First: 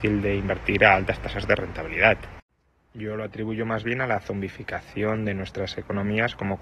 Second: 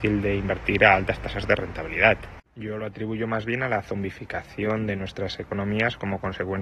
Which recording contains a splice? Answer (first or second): second